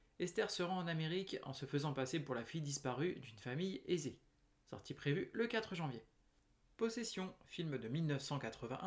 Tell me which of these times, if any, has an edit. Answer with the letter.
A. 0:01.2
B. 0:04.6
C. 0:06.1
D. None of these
D